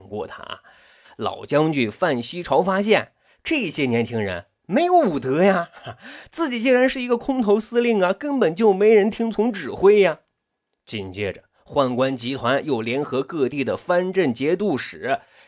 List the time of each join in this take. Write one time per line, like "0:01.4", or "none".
0:01.0

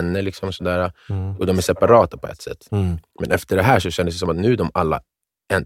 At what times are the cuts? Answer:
0:02.7

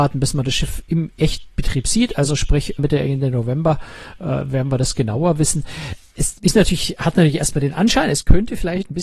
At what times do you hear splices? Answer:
0:02.8

